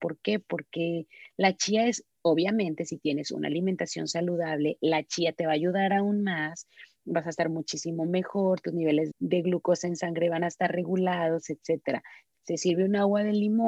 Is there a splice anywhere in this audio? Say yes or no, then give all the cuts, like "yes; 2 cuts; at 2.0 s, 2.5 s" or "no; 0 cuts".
yes; 2 cuts; at 9.1 s, 12.3 s